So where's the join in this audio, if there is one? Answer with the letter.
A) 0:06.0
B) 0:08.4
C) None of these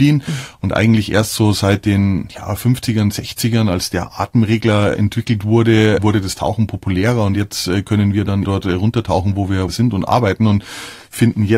B